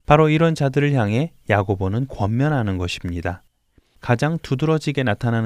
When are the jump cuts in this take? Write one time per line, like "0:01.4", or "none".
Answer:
0:03.9